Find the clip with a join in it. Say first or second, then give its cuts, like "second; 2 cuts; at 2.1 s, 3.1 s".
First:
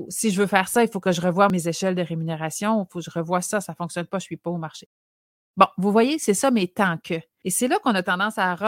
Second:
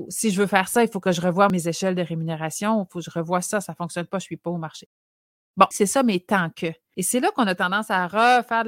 second; 1 cut; at 5.7 s